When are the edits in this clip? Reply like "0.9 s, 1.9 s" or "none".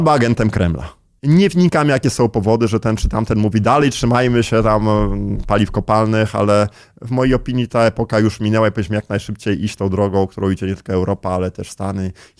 none